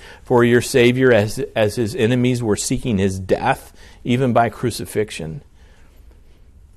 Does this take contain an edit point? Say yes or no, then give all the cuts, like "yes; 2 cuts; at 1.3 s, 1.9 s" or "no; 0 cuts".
no; 0 cuts